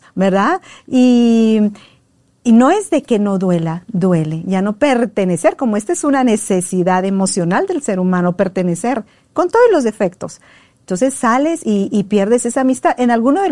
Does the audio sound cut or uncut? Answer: uncut